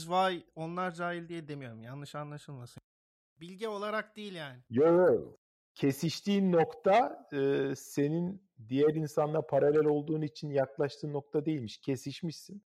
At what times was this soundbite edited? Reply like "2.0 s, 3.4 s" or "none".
none